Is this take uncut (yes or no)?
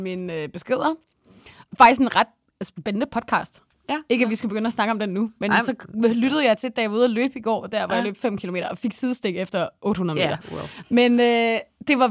yes